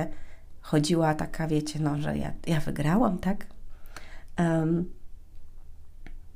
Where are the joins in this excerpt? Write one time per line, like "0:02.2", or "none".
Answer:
none